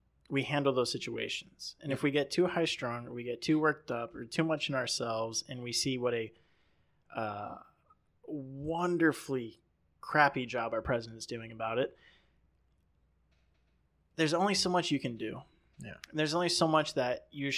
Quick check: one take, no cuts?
yes; 0 cuts

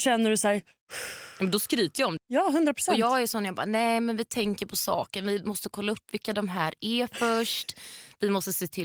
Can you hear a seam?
yes; 1 cut; at 2.2 s

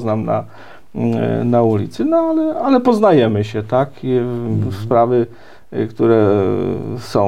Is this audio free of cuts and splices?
yes; 0 cuts

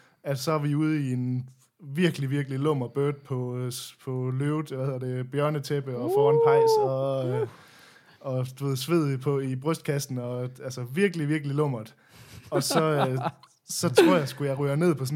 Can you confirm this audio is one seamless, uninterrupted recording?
yes; 0 cuts

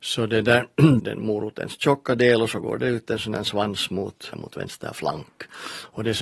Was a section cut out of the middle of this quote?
yes; 2 cuts; at 1.0 s, 4.3 s

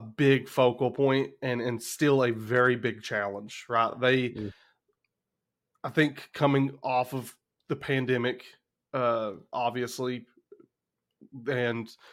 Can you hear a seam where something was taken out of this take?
no; 0 cuts

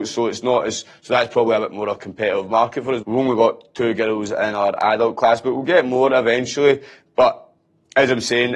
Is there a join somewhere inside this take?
yes; 1 cut; at 3.0 s

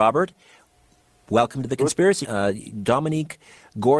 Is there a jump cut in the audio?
yes; 1 cut; at 2.2 s

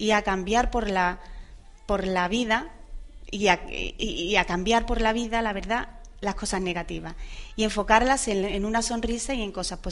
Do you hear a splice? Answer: no; 0 cuts

